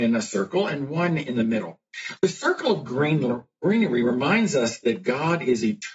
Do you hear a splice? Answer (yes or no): yes